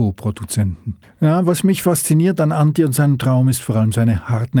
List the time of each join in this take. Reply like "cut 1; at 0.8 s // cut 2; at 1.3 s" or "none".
cut 1; at 1.0 s